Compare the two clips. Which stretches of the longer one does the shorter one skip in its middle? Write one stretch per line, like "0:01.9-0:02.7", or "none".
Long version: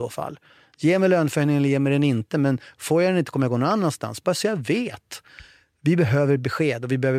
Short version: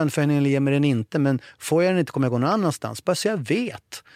none